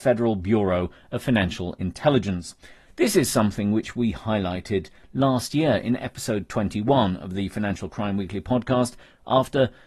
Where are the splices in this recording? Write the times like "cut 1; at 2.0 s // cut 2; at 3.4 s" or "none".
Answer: none

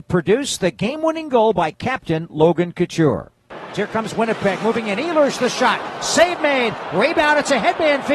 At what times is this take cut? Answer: cut 1; at 3.7 s

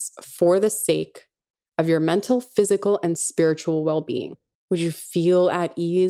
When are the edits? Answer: cut 1; at 4.5 s

